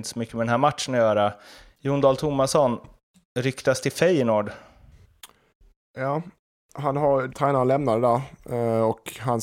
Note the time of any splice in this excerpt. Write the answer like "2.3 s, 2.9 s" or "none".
7.3 s